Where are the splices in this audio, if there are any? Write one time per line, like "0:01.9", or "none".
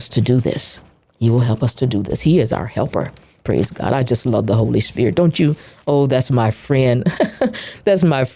none